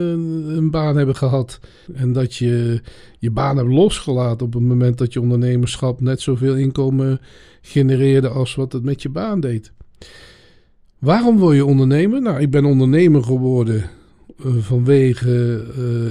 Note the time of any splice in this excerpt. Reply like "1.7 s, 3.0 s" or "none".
1.9 s